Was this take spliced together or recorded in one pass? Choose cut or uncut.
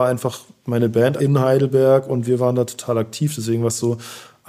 cut